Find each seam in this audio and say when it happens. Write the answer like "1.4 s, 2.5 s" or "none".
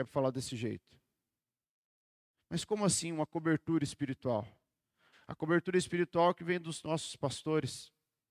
2.3 s, 5.1 s